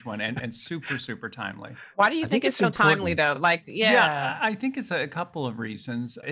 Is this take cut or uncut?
uncut